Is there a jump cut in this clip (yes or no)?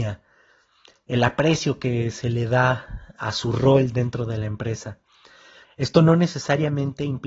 yes